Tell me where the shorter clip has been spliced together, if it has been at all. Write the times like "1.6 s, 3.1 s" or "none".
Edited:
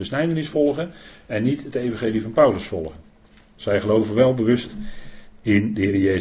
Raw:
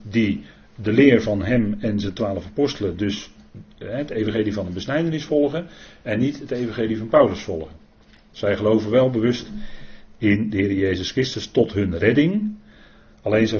none